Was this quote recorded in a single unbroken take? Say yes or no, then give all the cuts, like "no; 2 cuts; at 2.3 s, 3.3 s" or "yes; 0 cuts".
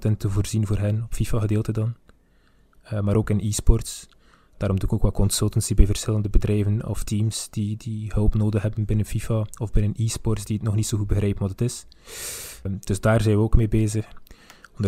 no; 1 cut; at 12.6 s